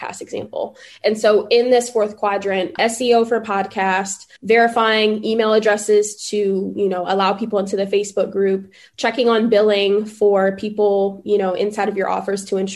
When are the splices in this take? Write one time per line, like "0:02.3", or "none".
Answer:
0:02.8
0:04.4